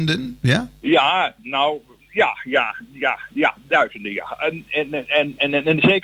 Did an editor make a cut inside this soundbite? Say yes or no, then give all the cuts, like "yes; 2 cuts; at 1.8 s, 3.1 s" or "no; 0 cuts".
no; 0 cuts